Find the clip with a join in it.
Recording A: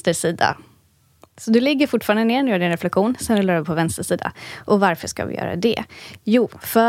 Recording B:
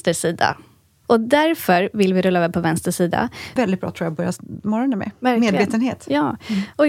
B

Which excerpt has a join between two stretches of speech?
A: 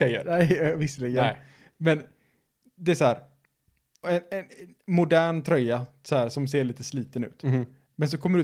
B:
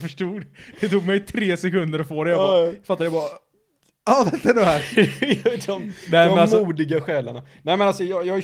A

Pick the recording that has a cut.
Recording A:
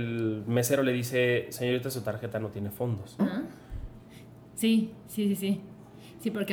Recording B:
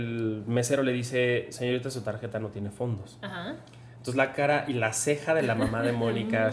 A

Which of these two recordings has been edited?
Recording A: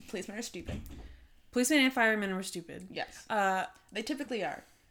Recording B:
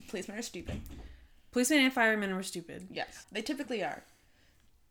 B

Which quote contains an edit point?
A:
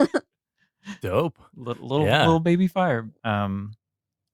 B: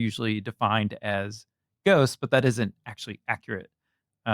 A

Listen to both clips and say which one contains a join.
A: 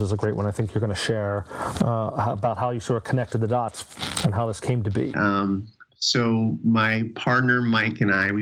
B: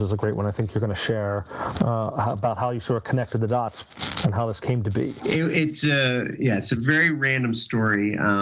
A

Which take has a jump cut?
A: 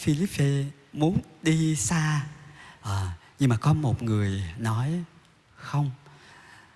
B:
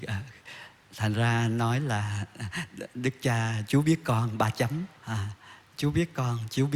B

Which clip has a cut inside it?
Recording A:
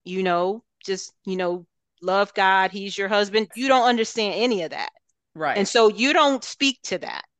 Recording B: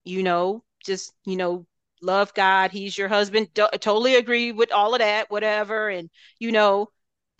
A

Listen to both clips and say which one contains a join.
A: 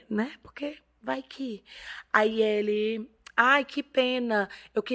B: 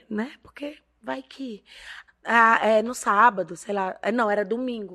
B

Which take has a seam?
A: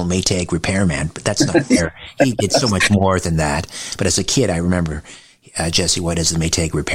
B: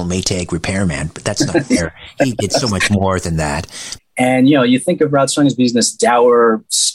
B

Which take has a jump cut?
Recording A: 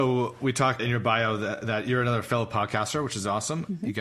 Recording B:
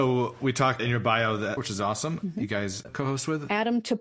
B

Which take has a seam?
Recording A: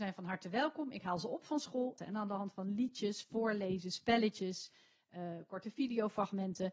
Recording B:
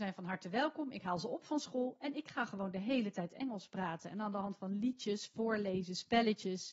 A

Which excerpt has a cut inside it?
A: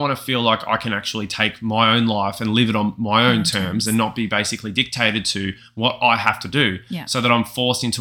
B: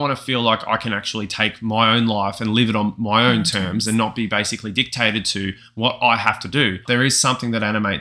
B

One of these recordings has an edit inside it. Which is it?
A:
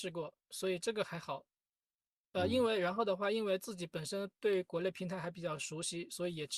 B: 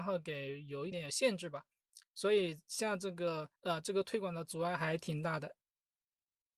B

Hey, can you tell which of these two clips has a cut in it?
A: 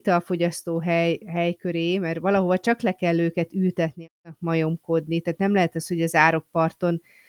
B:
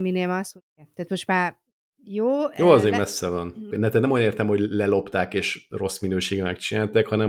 B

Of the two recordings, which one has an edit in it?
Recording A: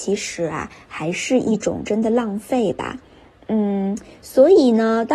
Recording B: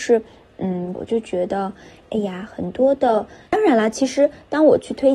B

